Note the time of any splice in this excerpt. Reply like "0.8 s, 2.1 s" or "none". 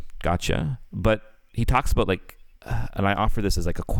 2.6 s